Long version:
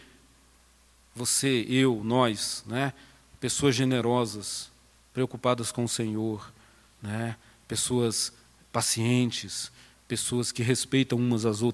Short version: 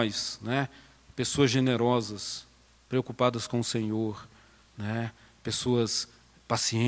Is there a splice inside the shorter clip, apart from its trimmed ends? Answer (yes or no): no